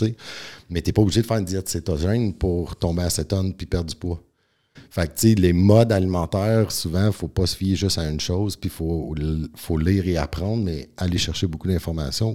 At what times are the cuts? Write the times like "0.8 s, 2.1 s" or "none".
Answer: 4.8 s